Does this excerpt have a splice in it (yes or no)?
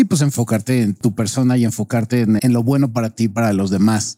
yes